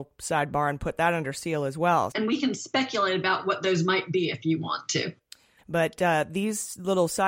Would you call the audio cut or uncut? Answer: cut